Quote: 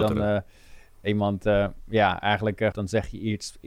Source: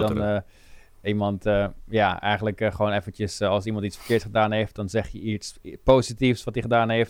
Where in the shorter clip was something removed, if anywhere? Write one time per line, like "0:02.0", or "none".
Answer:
0:02.7

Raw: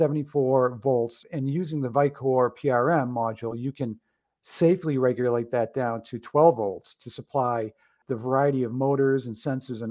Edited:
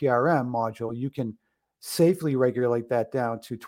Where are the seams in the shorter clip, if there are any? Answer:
none

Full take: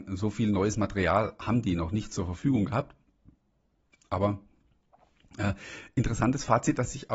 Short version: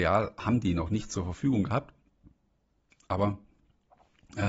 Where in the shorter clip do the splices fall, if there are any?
none

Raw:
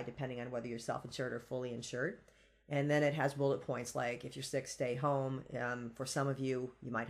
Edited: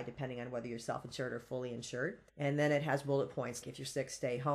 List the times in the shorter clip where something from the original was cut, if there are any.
0:02.3
0:03.6

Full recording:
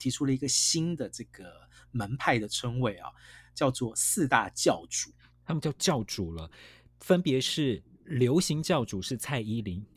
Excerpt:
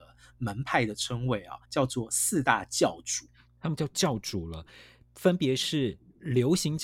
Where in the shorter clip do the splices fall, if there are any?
0:01.6

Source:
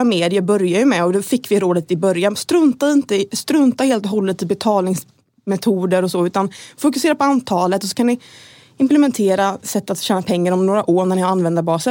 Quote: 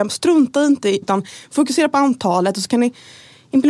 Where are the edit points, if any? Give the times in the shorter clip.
0:01.0

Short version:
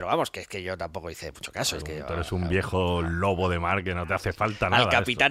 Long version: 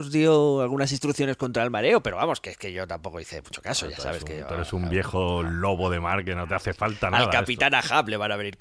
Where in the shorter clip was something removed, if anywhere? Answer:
0:01.8

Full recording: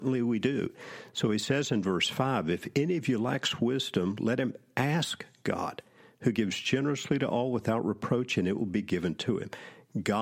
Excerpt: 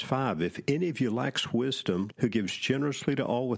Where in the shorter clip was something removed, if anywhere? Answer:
0:02.1

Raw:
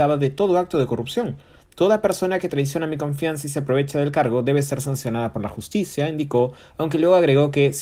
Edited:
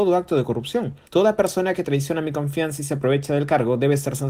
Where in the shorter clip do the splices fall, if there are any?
0:01.0

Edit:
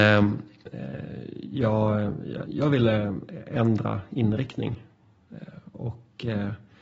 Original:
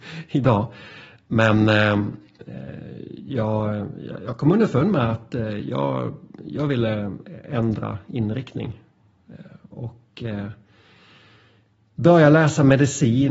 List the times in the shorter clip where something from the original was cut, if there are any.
0:02.5

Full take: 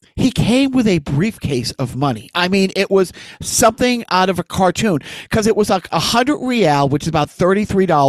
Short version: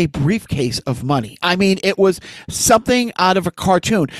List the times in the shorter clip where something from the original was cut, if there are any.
none

